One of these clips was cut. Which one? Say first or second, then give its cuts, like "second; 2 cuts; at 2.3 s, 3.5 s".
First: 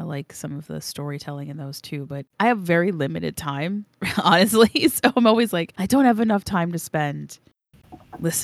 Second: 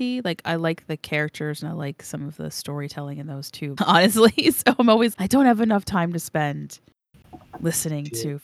second; 2 cuts; at 3.8 s, 5.1 s